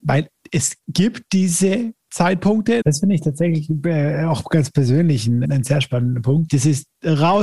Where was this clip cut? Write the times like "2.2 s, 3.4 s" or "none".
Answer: 2.8 s, 5.4 s, 6.5 s